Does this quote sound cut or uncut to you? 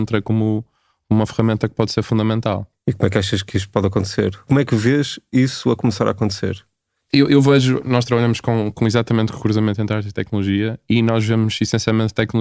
uncut